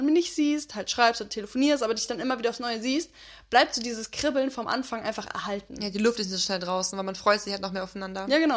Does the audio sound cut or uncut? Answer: uncut